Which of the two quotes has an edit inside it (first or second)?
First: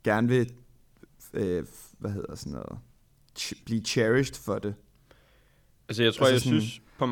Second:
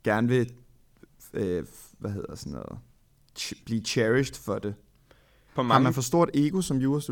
second